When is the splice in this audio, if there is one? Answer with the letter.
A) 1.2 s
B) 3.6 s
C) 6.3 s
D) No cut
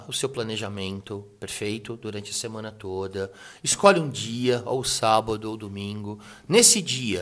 D